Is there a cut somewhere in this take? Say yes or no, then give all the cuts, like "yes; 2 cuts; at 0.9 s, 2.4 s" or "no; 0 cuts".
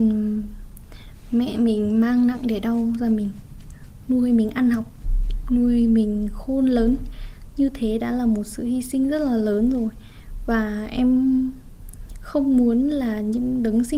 no; 0 cuts